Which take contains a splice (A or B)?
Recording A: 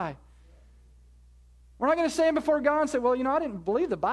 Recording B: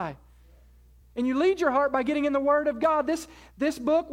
B